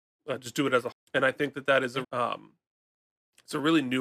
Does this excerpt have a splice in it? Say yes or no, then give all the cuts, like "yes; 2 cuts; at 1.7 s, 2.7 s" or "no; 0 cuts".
yes; 2 cuts; at 0.9 s, 2.0 s